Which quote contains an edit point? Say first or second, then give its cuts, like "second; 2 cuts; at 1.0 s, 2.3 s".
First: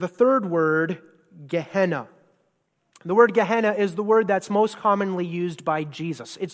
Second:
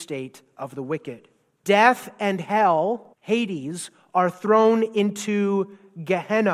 second; 2 cuts; at 1.6 s, 3.1 s